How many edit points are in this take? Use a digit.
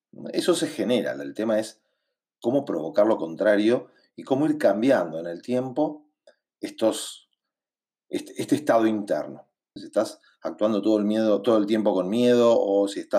1